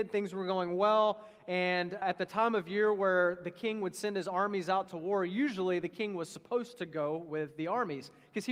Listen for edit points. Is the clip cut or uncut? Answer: cut